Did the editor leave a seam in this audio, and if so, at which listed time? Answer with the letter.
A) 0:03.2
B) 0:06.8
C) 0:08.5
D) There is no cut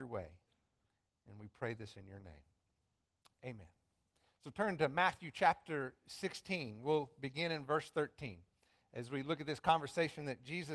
D